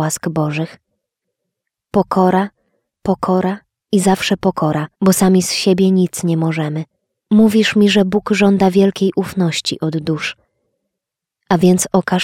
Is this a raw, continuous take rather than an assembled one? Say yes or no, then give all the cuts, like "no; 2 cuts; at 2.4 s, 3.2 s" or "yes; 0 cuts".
no; 2 cuts; at 4.9 s, 7.2 s